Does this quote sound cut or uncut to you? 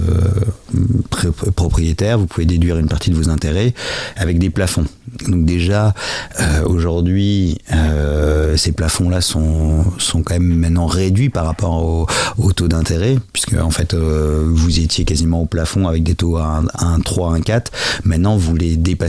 uncut